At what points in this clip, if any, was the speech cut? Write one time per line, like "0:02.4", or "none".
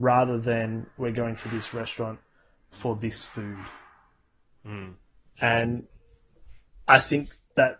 none